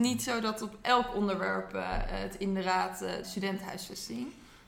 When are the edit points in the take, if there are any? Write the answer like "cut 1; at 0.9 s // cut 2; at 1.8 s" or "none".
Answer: cut 1; at 3.2 s